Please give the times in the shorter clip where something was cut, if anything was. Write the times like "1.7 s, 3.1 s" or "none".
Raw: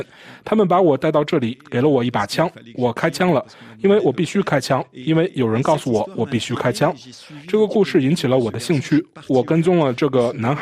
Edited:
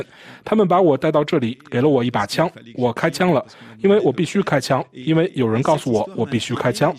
none